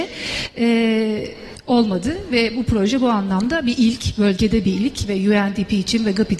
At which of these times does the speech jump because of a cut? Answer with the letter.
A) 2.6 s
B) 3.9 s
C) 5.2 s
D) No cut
D